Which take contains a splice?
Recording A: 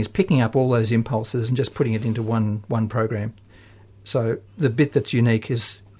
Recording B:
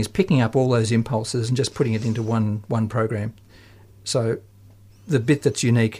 A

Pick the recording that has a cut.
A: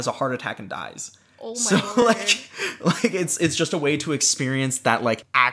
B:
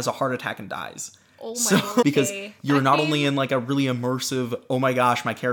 B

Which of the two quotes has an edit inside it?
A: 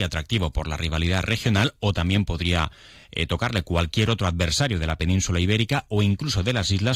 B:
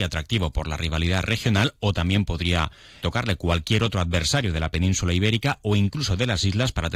B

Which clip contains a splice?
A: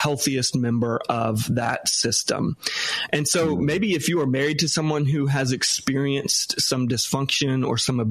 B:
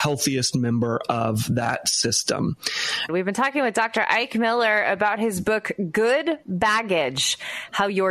B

